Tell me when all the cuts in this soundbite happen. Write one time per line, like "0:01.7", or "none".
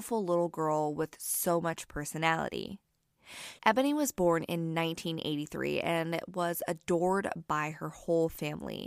0:03.6